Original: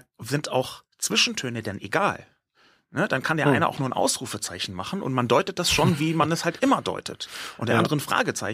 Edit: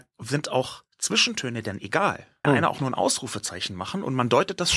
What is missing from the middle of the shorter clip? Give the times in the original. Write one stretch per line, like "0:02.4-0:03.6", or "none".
0:02.4-0:03.4